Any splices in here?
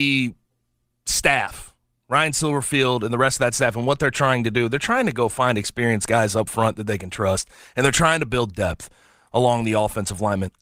no; 0 cuts

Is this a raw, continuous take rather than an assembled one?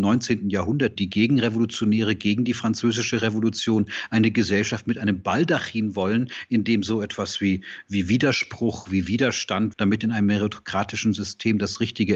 no; 1 cut; at 9.7 s

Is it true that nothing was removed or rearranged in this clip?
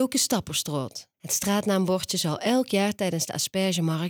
no; 1 cut; at 1.1 s

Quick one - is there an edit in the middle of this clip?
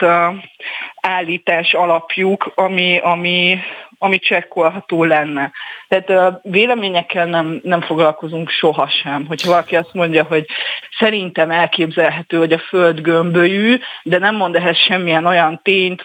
no; 0 cuts

